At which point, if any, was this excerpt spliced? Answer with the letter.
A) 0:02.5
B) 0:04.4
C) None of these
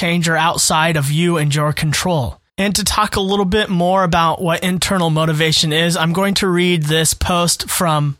A